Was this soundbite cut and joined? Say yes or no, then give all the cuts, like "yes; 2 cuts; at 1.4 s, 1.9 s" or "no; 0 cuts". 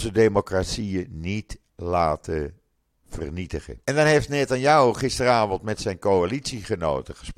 yes; 1 cut; at 3.8 s